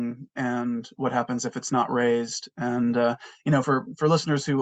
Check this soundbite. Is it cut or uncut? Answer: uncut